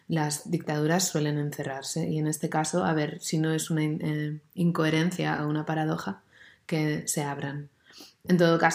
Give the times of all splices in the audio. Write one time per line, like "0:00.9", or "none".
none